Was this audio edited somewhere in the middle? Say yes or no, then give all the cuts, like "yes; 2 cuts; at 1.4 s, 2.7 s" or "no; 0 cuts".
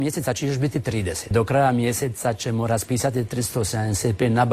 yes; 1 cut; at 1.3 s